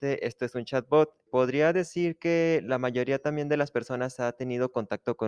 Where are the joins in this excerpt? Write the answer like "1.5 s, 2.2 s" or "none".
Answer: 1.3 s